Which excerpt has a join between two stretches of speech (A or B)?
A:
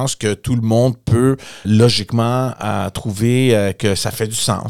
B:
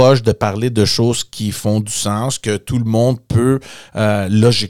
A